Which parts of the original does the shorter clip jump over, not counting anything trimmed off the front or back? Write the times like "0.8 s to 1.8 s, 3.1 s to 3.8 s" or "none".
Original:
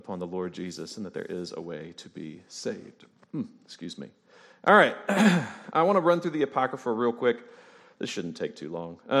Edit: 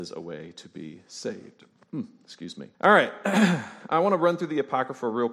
4.2 s to 4.6 s